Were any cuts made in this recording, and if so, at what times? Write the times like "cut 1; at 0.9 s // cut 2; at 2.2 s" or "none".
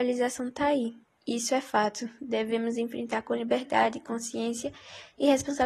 none

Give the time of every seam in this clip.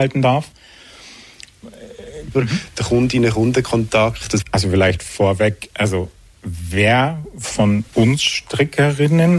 cut 1; at 2.3 s // cut 2; at 4.4 s // cut 3; at 7.9 s

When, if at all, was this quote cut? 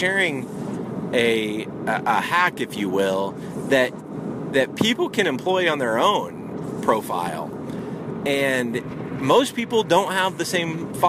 none

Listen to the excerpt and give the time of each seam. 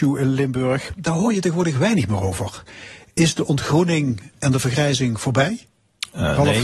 none

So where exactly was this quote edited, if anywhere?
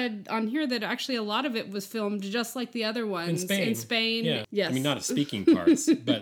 cut 1; at 4.4 s

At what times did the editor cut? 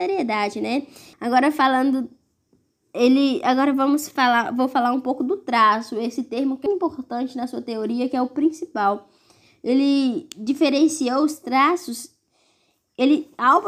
cut 1; at 1.1 s // cut 2; at 6.7 s

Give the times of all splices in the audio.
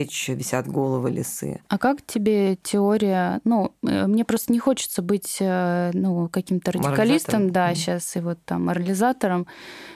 none

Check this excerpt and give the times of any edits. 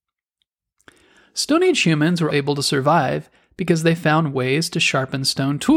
cut 1; at 2.3 s

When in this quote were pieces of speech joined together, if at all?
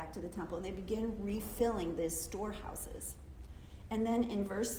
none

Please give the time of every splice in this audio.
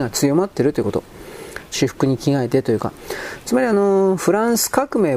cut 1; at 1.7 s

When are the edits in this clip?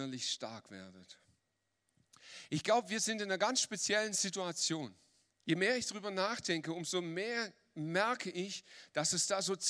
cut 1; at 5.3 s

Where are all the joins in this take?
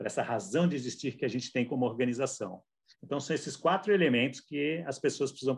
cut 1; at 2.9 s

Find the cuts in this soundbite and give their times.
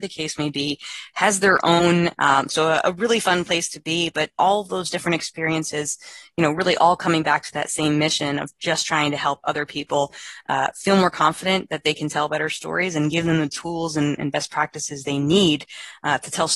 cut 1; at 2.1 s

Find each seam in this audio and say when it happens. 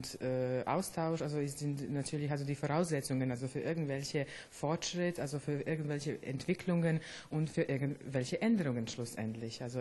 none

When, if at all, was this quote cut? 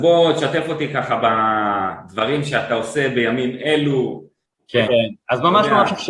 cut 1; at 4.9 s

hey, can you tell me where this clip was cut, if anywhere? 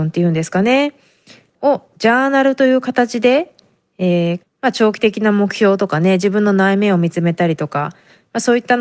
cut 1; at 4.4 s

